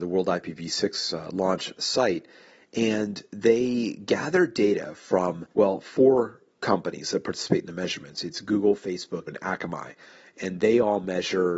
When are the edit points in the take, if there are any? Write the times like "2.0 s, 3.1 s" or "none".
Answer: 5.5 s, 9.3 s